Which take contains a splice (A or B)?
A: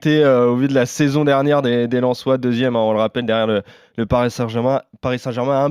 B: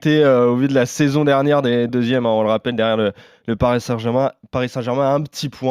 B